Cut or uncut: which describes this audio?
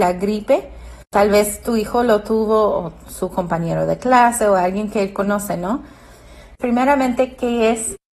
cut